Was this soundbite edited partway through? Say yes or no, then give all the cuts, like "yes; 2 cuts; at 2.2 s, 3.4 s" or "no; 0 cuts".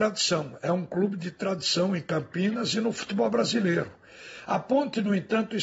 no; 0 cuts